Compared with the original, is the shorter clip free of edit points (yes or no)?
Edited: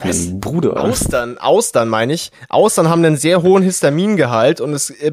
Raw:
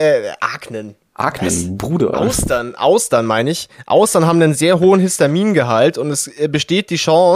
yes